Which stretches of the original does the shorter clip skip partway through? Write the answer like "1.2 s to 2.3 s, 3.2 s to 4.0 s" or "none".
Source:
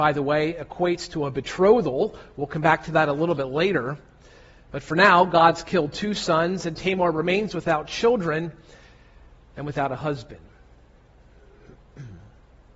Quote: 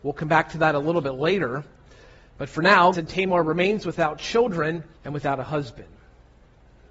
5.3 s to 6.6 s, 8.6 s to 9.5 s